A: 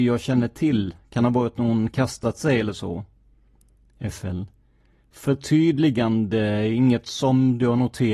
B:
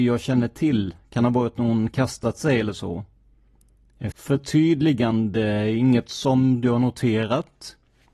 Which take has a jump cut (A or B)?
B